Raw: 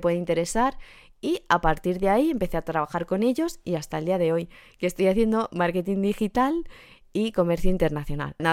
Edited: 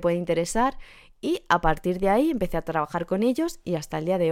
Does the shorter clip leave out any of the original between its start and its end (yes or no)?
no